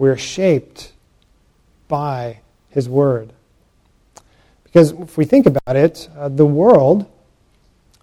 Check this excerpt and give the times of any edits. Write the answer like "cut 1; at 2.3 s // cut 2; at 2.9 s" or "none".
none